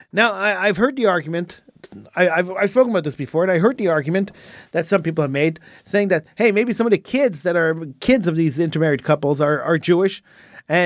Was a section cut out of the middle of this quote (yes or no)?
no